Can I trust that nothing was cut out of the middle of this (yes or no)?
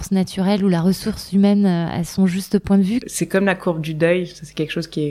no